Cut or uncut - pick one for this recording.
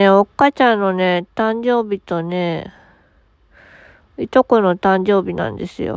uncut